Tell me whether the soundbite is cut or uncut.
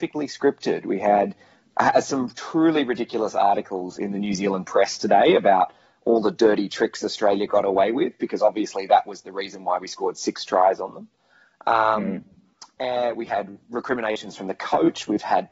uncut